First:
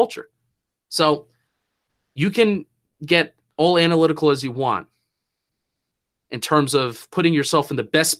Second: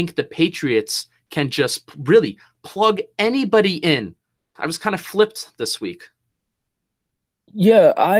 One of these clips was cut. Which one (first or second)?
second